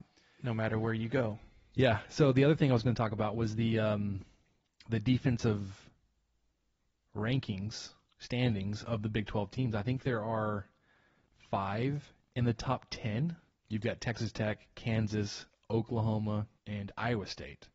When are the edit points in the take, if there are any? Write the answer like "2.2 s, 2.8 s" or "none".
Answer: 13.5 s, 16.6 s